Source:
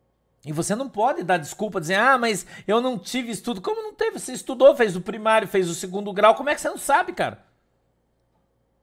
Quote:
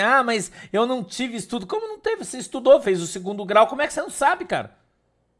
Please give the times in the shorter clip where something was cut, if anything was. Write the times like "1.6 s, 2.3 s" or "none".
2.8 s